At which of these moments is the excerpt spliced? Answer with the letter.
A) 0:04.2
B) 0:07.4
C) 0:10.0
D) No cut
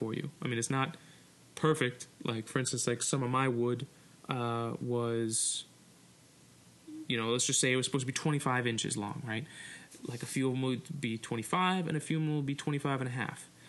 D